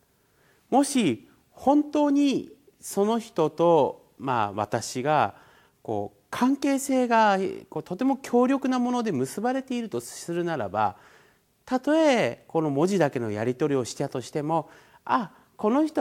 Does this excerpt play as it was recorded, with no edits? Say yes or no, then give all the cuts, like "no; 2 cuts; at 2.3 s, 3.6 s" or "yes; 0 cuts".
yes; 0 cuts